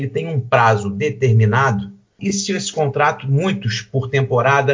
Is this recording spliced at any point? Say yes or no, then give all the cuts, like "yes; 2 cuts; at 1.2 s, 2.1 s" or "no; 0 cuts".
yes; 1 cut; at 2.2 s